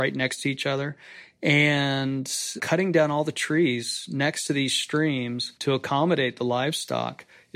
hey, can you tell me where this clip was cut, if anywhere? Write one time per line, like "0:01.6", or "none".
0:02.6